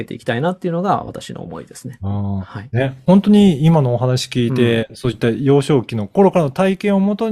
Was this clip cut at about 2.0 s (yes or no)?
no